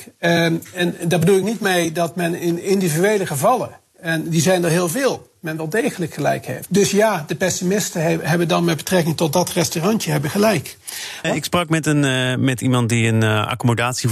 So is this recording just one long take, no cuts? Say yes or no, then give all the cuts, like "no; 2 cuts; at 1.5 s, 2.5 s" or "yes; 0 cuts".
no; 2 cuts; at 6.7 s, 11.2 s